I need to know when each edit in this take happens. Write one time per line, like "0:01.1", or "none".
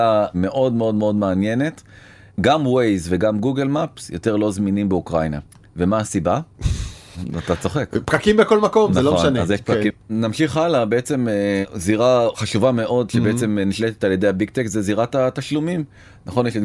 0:09.9